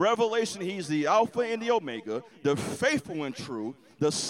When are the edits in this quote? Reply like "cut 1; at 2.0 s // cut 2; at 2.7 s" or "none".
cut 1; at 2.3 s